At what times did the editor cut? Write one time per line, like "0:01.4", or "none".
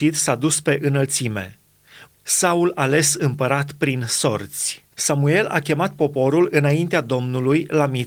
0:02.1
0:04.9